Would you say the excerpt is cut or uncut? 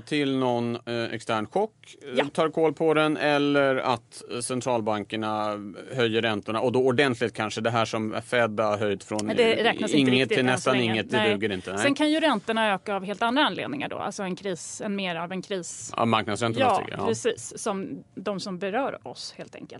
uncut